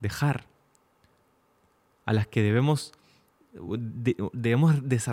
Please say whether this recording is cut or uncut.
uncut